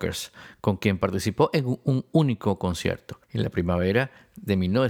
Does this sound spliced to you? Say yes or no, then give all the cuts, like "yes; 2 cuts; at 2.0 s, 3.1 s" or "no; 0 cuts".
yes; 1 cut; at 3.2 s